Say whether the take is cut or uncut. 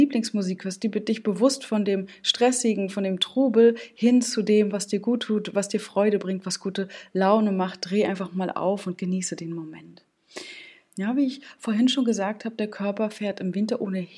cut